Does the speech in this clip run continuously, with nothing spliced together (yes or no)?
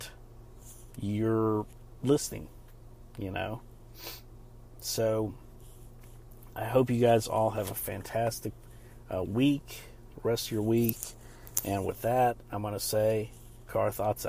yes